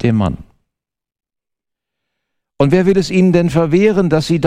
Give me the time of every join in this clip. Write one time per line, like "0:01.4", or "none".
0:02.4